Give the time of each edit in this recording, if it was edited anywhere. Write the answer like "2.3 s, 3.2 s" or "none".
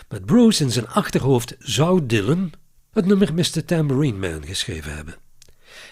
2.9 s